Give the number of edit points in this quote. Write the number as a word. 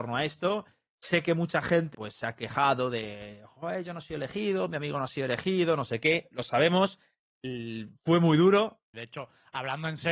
two